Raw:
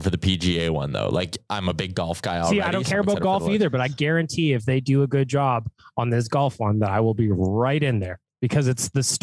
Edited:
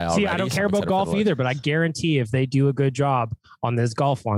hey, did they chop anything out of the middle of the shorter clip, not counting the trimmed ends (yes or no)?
no